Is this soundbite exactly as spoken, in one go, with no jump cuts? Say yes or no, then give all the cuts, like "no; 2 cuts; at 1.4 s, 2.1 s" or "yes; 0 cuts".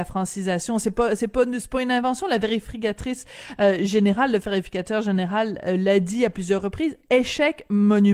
yes; 0 cuts